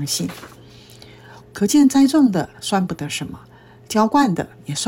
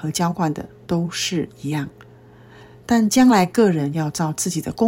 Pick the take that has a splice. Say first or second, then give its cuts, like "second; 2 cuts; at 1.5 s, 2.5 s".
first; 1 cut; at 1.4 s